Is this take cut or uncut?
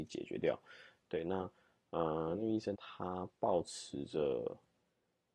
cut